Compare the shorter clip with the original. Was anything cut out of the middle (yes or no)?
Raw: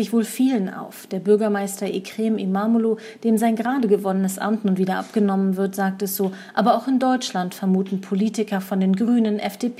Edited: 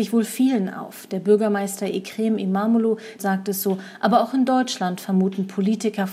yes